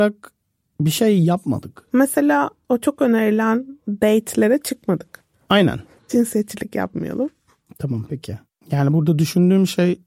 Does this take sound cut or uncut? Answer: cut